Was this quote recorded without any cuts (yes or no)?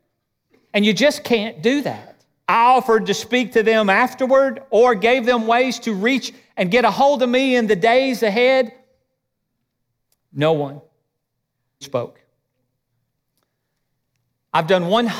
no